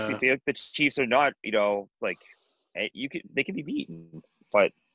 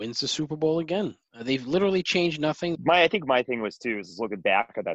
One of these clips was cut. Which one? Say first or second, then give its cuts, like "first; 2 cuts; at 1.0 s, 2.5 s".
second; 2 cuts; at 1.3 s, 2.7 s